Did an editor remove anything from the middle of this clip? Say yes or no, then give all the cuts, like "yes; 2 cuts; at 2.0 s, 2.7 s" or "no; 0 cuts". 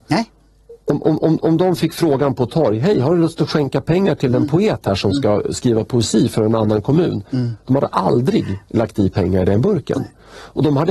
no; 0 cuts